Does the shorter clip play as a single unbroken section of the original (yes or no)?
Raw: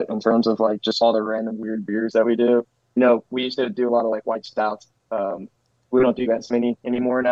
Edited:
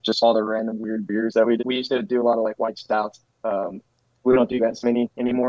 no